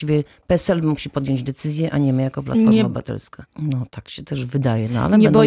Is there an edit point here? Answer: yes; 1 cut; at 3.5 s

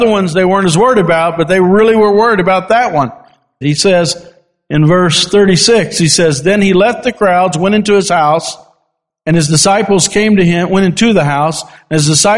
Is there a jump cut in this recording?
yes; 1 cut; at 3.6 s

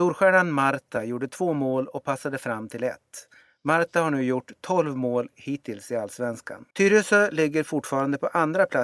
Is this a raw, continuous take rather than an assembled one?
no; 1 cut; at 6.7 s

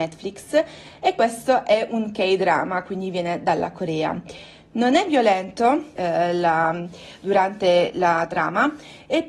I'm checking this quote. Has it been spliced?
yes; 1 cut; at 6.0 s

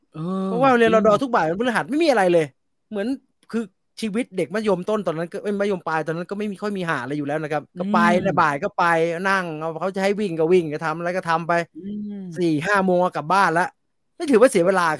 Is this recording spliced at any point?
yes; 1 cut; at 7.7 s

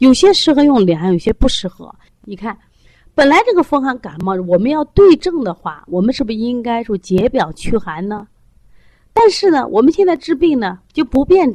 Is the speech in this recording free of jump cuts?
no; 1 cut; at 2.1 s

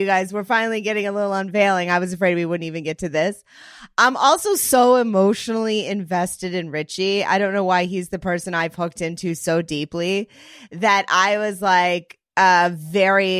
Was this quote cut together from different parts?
no; 0 cuts

